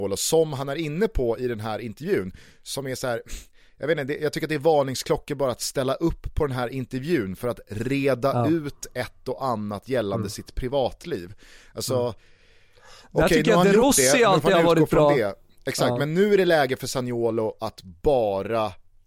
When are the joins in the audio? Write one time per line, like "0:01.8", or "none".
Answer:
none